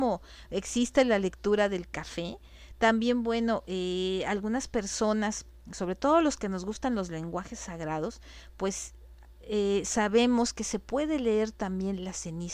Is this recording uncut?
yes; 0 cuts

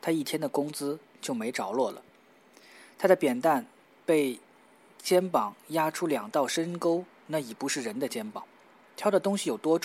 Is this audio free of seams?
yes; 0 cuts

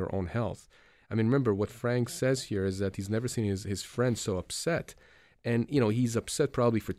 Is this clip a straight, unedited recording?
yes; 0 cuts

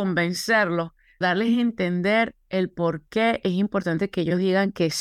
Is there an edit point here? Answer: yes; 1 cut; at 1.2 s

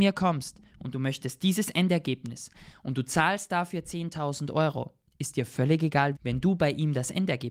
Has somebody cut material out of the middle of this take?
yes; 1 cut; at 6.1 s

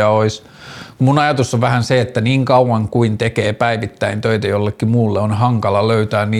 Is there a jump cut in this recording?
no; 0 cuts

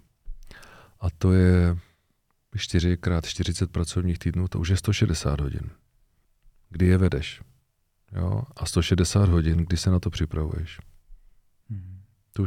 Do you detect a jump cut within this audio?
no; 0 cuts

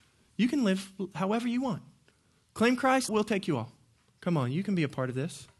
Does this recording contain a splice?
yes; 1 cut; at 3.1 s

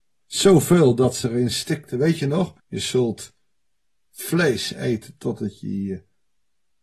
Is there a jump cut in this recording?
yes; 1 cut; at 2.6 s

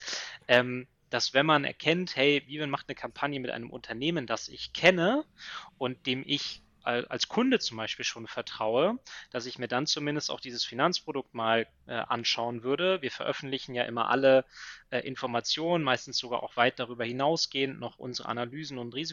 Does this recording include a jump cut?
no; 0 cuts

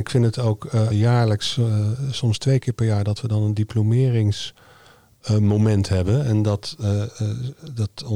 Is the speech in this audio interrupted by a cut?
yes; 1 cut; at 0.9 s

